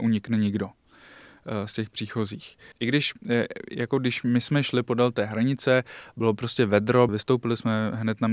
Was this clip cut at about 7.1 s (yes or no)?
yes